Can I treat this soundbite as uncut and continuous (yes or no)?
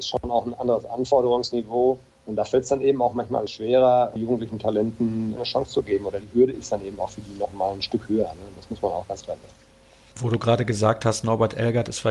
yes